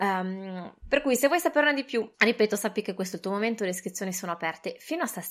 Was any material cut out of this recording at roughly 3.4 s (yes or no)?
no